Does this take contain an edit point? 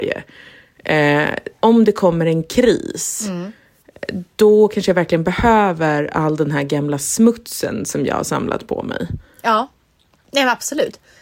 no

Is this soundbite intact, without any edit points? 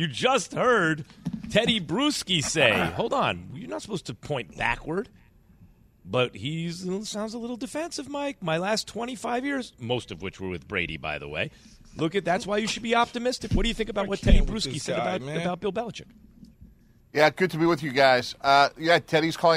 yes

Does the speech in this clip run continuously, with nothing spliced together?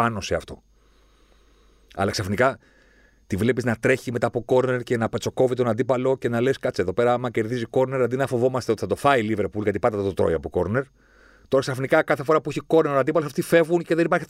yes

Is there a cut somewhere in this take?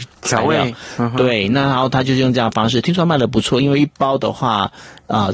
no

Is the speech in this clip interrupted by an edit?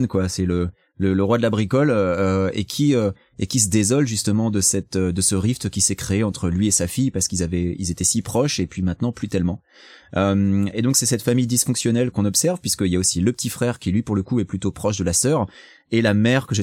yes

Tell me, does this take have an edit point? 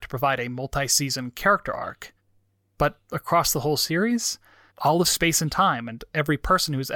yes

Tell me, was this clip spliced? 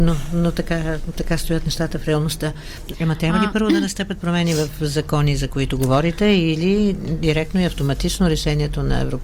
yes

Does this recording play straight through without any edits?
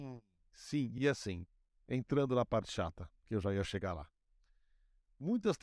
yes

